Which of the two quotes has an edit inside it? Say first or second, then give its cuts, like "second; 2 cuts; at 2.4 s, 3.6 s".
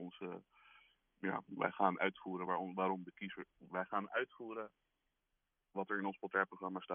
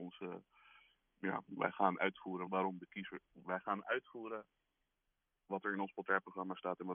second; 1 cut; at 2.5 s